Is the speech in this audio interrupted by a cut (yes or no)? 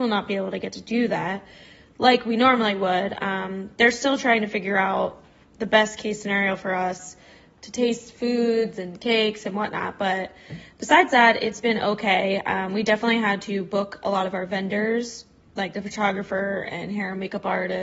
no